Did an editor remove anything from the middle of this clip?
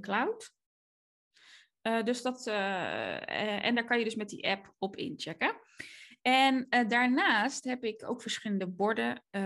no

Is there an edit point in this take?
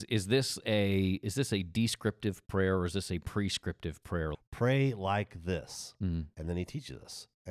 yes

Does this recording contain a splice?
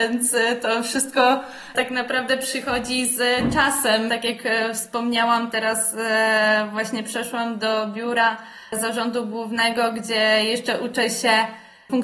yes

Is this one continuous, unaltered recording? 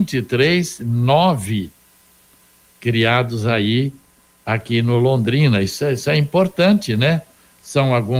yes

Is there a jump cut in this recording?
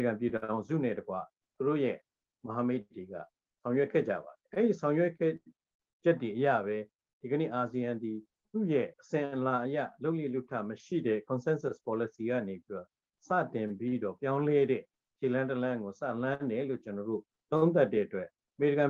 yes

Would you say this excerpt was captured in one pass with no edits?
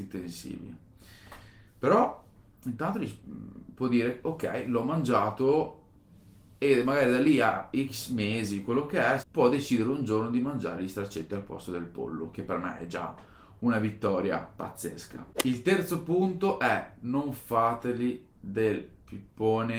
no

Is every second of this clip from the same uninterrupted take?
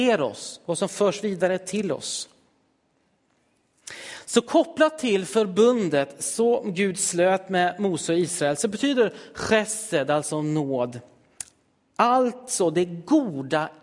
yes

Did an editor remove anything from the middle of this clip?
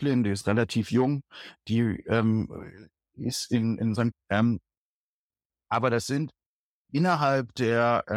yes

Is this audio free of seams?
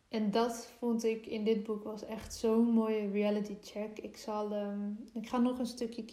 yes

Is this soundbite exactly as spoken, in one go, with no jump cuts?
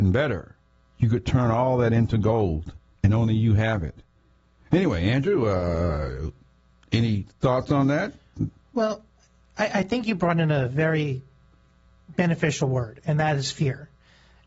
yes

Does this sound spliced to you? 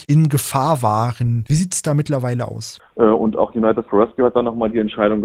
yes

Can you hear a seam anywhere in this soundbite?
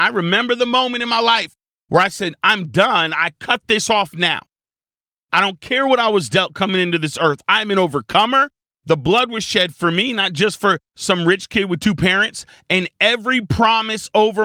no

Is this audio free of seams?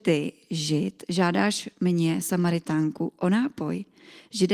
yes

